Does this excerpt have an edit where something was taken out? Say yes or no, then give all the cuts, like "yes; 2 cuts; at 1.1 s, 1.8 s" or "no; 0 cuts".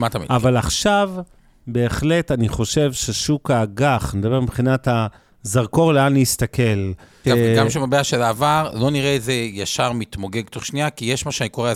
yes; 2 cuts; at 4.1 s, 7.2 s